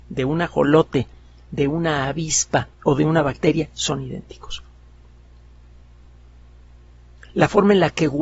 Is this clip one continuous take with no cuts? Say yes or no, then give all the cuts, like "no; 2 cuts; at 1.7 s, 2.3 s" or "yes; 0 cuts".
yes; 0 cuts